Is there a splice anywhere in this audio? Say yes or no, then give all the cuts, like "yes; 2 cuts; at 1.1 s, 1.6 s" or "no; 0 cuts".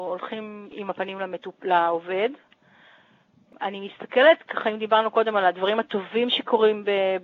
no; 0 cuts